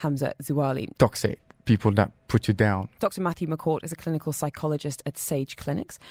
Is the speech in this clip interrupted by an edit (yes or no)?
yes